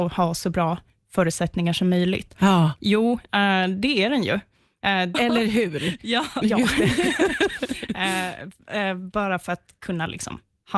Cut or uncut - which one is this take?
cut